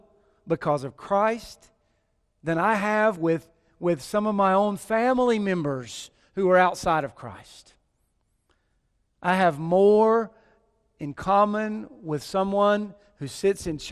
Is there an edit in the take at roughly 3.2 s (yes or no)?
no